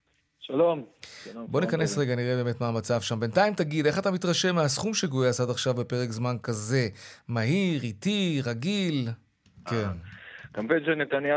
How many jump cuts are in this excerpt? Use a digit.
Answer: 1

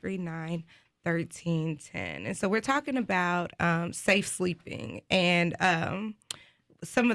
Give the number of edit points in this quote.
0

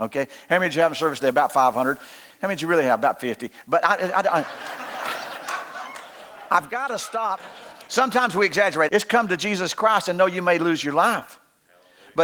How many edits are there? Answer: 2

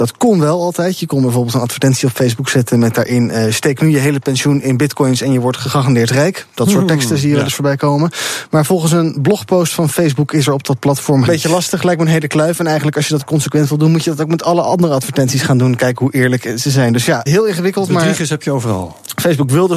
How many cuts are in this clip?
2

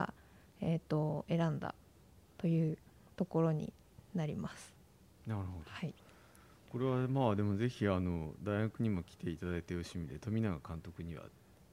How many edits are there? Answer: 0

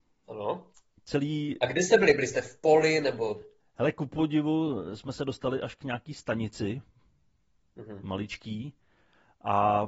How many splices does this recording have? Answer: 0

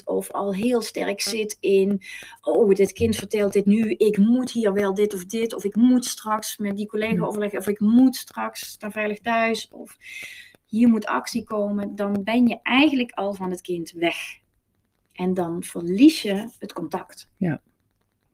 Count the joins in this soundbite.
0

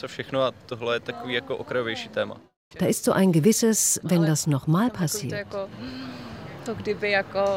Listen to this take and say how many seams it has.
2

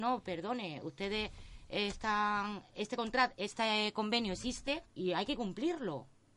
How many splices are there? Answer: 1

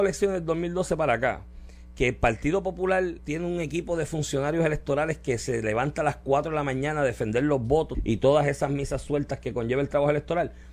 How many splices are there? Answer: 2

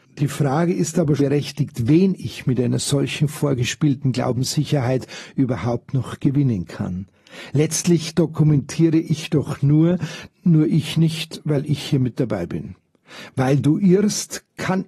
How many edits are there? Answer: 2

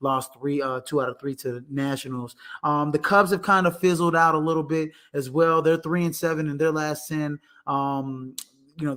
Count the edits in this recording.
1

